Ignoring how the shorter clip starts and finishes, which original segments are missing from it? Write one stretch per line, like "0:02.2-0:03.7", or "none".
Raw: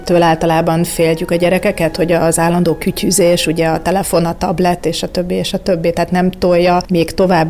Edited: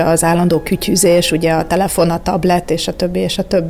none